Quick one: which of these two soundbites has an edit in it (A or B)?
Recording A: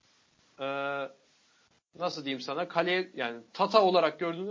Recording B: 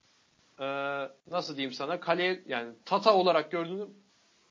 B